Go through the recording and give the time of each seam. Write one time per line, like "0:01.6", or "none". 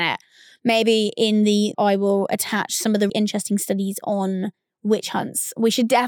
0:01.7
0:03.1